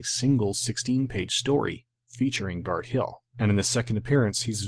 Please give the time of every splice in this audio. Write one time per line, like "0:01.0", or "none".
none